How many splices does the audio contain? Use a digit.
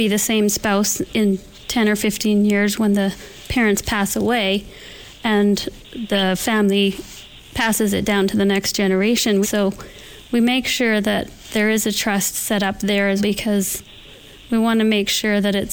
2